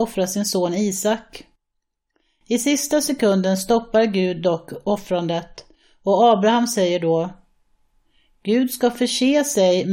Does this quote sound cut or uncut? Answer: uncut